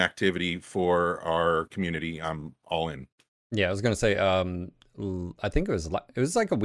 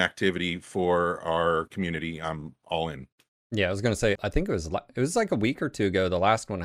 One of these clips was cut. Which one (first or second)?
second